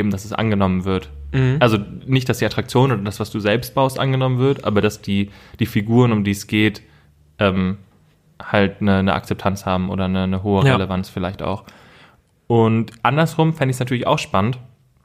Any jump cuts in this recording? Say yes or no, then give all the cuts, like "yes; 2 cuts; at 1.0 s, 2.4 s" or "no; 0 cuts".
no; 0 cuts